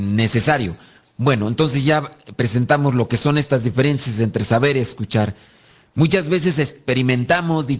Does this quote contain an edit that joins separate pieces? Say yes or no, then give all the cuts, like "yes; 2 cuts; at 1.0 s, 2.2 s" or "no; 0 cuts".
no; 0 cuts